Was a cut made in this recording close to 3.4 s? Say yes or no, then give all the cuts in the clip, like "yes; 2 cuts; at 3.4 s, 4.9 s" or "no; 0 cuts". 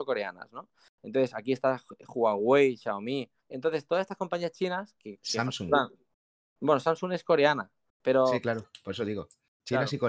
yes; 1 cut; at 3.4 s